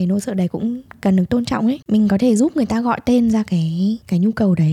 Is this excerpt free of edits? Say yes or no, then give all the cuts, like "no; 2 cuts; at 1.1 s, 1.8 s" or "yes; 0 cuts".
no; 1 cut; at 1.8 s